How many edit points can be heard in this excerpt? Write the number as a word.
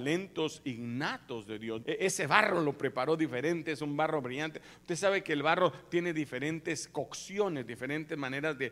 one